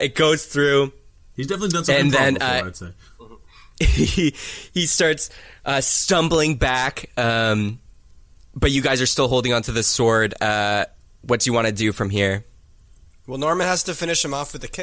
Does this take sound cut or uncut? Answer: uncut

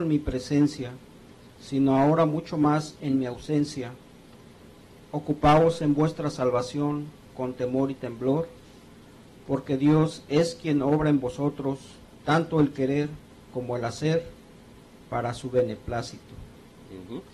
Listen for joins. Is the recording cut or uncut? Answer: uncut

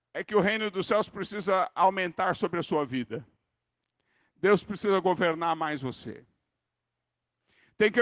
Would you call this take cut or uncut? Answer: uncut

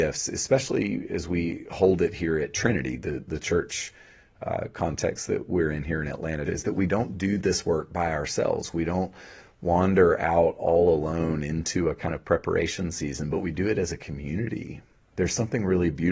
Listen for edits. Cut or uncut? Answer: cut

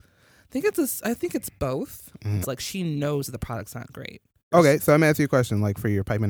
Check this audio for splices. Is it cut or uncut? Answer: cut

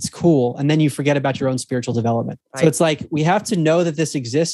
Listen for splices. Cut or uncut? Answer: uncut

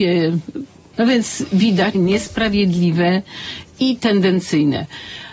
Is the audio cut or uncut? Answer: cut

